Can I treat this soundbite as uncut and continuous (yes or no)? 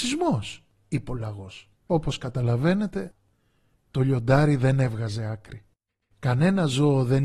no